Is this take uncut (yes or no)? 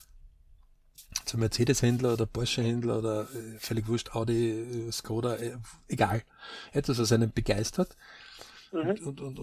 yes